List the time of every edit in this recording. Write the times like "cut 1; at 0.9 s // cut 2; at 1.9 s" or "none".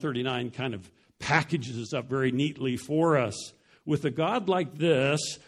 none